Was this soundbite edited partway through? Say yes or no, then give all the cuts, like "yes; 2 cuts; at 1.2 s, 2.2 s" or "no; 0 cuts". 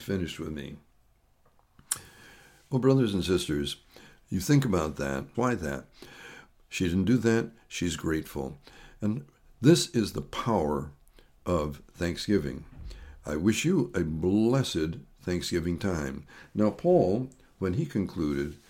yes; 1 cut; at 5.3 s